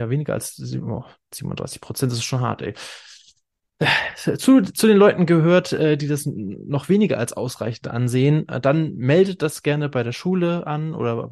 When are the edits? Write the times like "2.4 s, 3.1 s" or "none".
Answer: none